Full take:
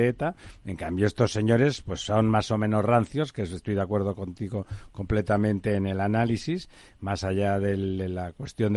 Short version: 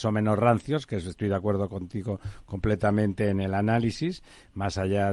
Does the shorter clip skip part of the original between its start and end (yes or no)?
no